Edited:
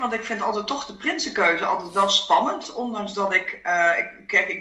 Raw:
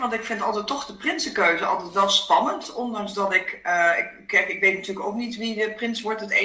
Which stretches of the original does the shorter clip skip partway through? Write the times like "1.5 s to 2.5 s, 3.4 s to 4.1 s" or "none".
none